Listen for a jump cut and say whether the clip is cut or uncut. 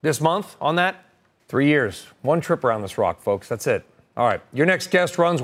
cut